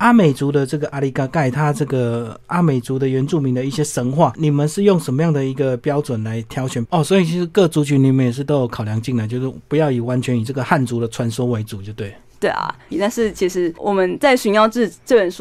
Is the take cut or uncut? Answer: cut